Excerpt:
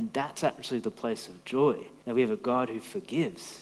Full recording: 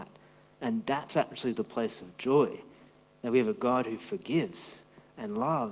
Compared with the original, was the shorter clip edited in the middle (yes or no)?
yes